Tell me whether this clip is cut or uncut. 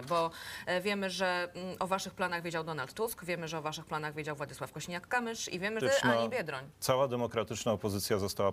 cut